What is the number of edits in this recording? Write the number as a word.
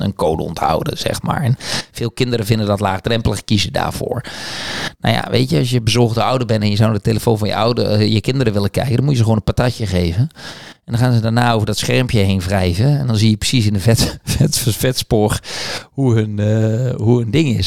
zero